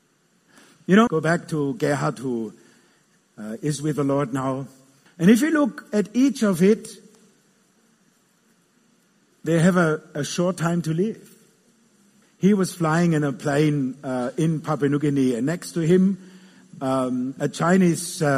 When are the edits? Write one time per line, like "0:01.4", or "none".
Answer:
0:01.1
0:05.1
0:12.2